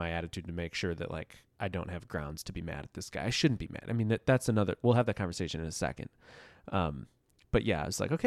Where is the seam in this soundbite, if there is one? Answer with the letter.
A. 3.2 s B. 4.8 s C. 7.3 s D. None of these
D